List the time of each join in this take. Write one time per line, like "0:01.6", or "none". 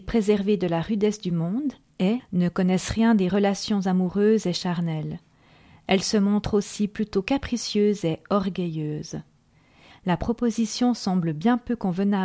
0:02.2
0:09.9